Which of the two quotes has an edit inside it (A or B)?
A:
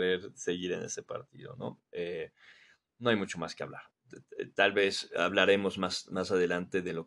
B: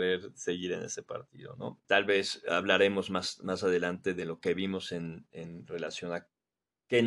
B